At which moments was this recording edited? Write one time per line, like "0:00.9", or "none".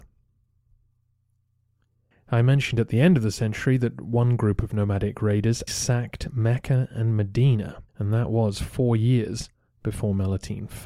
0:02.1
0:05.7
0:07.9